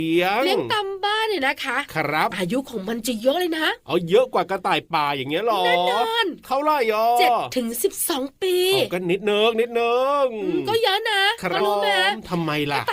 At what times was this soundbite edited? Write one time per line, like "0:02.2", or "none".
0:11.6